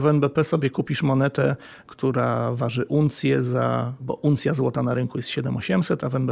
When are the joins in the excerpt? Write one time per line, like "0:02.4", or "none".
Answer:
none